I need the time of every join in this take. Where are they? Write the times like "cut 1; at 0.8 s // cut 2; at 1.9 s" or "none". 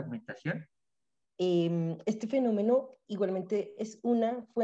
cut 1; at 1.2 s